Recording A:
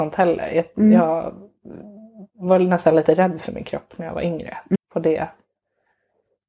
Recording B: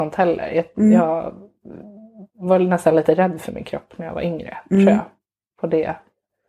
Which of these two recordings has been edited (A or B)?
A